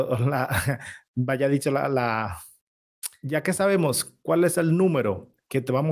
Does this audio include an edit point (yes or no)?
no